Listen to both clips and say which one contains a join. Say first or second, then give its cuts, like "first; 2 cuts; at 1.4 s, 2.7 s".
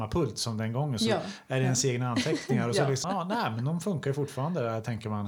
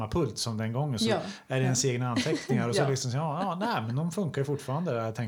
first; 1 cut; at 3.0 s